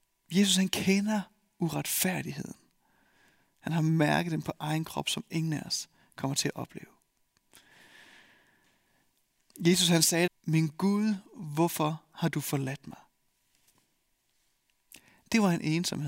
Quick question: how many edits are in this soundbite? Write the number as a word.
one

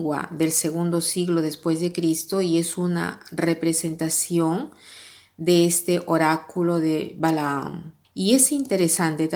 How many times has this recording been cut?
one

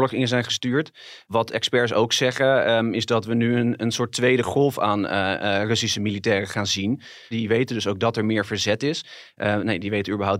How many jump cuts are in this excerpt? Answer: one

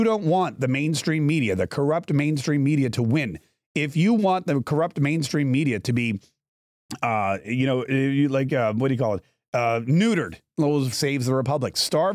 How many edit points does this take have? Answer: one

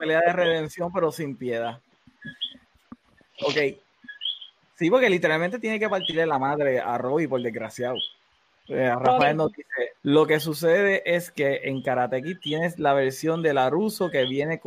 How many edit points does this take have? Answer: two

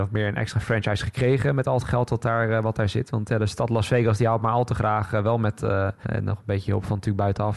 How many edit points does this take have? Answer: one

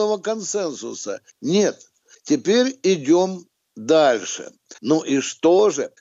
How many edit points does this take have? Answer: two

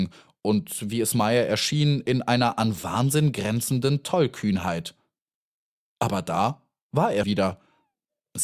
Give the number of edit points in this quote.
one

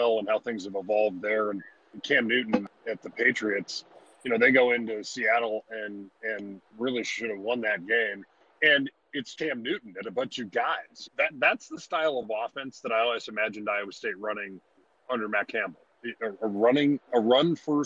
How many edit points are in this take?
two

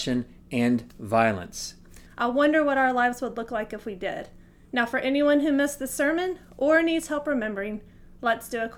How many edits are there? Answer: one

